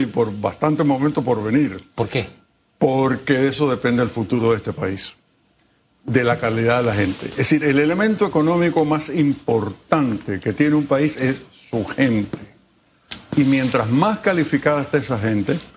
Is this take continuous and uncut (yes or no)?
yes